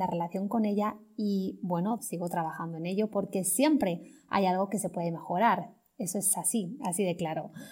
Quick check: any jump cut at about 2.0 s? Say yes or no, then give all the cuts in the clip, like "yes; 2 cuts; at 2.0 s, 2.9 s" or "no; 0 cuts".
yes; 1 cut; at 2.0 s